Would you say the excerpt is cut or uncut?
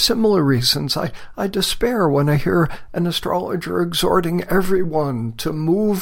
uncut